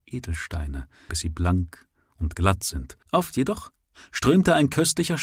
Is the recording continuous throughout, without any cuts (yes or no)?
no